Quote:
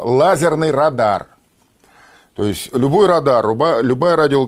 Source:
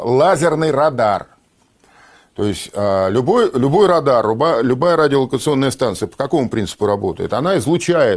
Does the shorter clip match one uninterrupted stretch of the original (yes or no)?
no